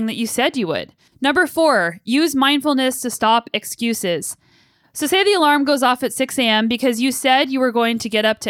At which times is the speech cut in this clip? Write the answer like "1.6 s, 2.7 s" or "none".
1.1 s

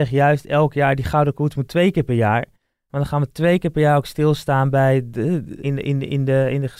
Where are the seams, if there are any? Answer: 5.6 s

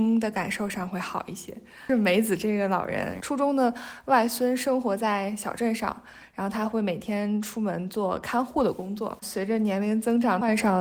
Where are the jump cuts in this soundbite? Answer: 3.2 s, 9.2 s

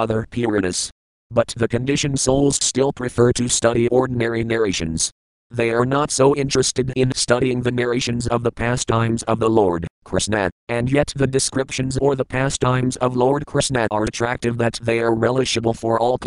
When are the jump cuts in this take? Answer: 10.6 s, 14.1 s

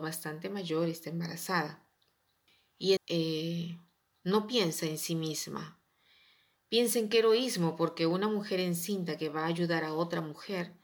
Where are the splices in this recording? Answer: 3.0 s

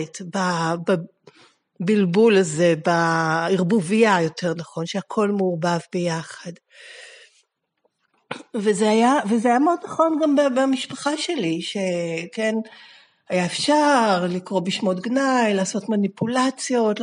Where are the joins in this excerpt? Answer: none

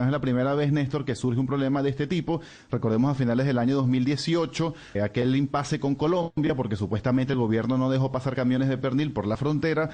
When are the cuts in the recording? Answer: 4.9 s

